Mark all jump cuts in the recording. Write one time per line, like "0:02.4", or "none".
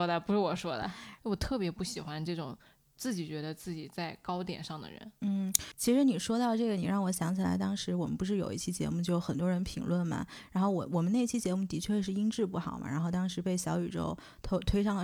0:01.2